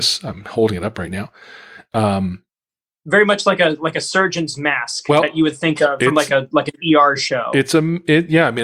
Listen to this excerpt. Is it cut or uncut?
uncut